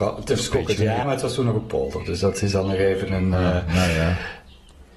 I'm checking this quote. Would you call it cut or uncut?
cut